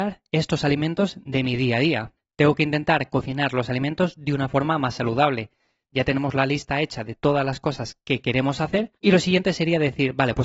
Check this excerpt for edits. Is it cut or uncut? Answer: cut